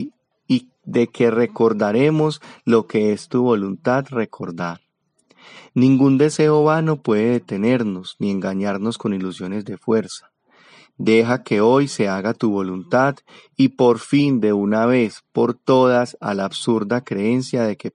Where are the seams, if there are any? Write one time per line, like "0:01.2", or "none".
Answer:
none